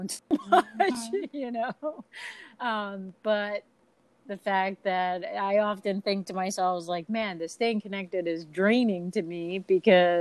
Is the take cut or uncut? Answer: uncut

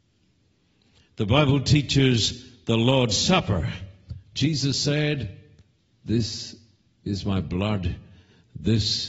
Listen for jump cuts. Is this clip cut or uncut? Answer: uncut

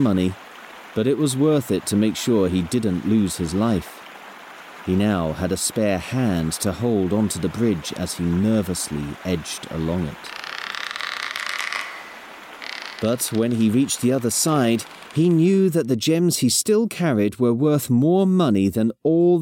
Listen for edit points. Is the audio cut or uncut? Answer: uncut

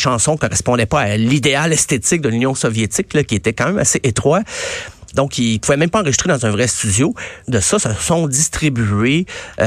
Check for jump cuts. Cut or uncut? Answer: cut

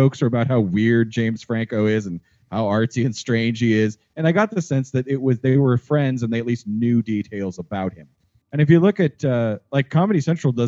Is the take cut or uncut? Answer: uncut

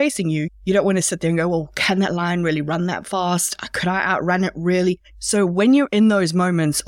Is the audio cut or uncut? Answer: cut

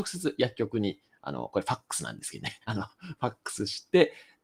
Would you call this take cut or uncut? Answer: uncut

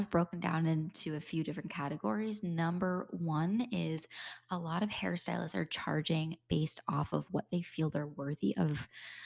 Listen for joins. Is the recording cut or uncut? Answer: uncut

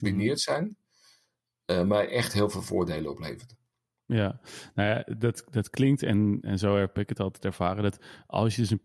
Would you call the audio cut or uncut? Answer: uncut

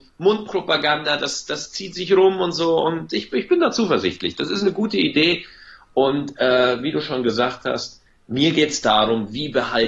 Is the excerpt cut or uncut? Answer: uncut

